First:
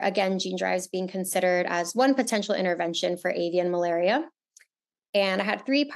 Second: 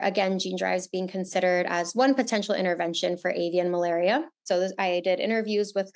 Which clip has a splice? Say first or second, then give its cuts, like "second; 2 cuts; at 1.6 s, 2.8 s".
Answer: second; 1 cut; at 4.5 s